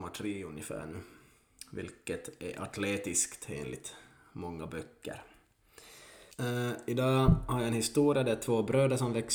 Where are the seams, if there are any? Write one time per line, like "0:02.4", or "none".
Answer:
0:06.3